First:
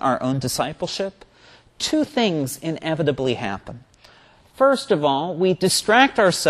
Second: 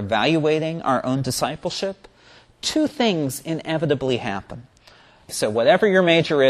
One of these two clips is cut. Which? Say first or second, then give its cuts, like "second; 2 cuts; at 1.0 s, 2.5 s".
second; 1 cut; at 5.3 s